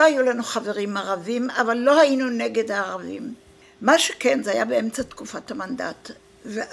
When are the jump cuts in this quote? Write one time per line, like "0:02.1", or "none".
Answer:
none

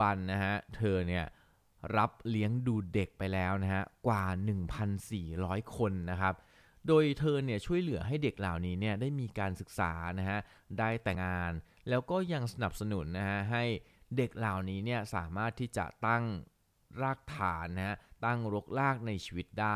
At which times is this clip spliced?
0:11.1

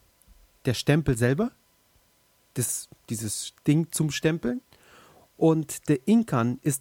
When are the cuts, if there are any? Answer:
none

